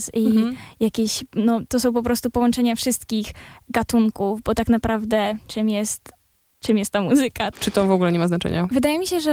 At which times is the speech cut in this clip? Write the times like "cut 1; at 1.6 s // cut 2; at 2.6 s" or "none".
cut 1; at 7.5 s